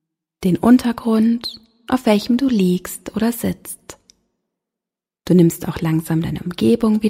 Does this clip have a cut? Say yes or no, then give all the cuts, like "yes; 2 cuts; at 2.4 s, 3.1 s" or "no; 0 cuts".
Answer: no; 0 cuts